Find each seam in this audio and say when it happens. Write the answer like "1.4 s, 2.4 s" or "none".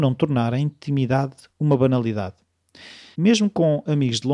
3.1 s